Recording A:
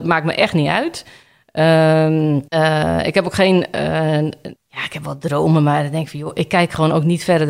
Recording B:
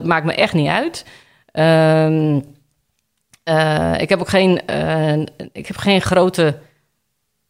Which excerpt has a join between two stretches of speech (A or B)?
A